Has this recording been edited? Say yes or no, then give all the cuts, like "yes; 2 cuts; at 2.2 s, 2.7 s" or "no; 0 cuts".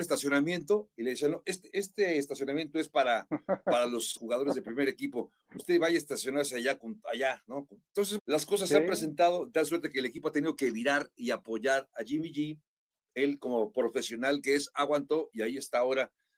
yes; 3 cuts; at 1.7 s, 4.2 s, 8.2 s